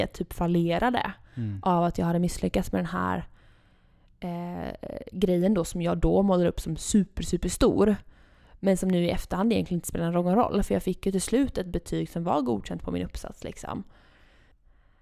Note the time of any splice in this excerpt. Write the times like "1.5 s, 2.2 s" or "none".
none